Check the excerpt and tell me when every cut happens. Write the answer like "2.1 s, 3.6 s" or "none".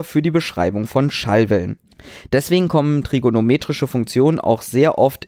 none